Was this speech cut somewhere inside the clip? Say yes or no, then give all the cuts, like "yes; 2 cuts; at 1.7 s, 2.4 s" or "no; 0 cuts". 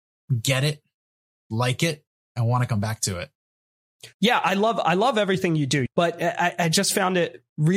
no; 0 cuts